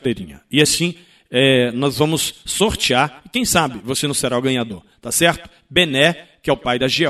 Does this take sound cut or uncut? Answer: uncut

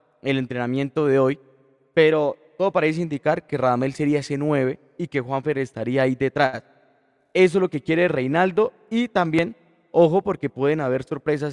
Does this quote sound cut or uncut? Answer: uncut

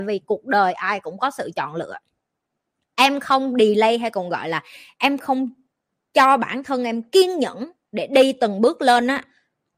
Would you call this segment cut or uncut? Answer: uncut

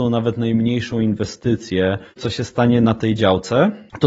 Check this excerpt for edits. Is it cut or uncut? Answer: cut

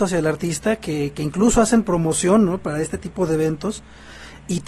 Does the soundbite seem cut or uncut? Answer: uncut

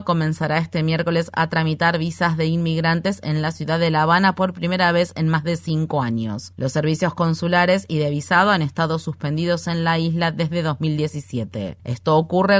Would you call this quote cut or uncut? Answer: uncut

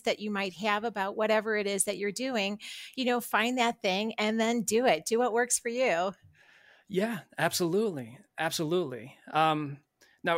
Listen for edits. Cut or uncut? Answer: uncut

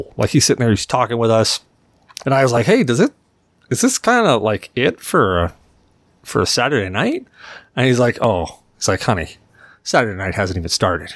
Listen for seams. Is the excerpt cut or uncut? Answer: cut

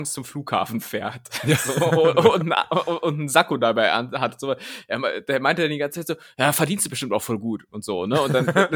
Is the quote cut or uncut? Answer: uncut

